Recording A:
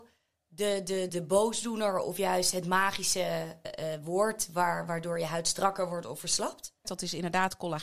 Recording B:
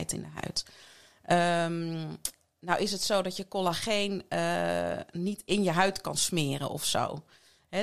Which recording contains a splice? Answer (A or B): A